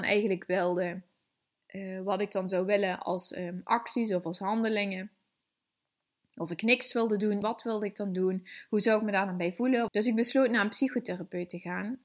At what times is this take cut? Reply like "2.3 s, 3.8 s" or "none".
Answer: 7.4 s, 9.9 s